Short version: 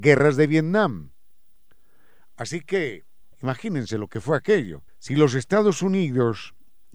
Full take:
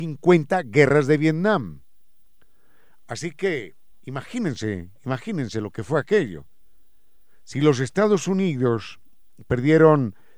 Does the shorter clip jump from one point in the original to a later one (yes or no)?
yes